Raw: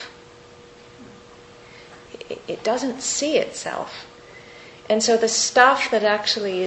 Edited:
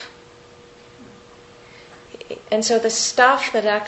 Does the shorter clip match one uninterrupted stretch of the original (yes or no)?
no